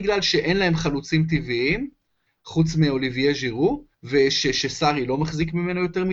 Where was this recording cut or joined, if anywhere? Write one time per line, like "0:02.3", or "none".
0:03.9